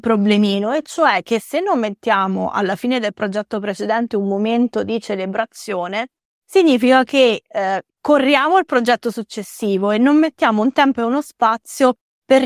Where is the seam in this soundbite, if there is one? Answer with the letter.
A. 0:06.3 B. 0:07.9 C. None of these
B